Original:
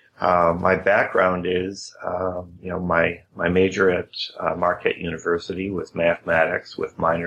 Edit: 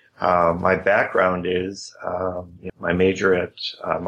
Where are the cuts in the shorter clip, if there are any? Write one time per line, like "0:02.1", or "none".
0:02.7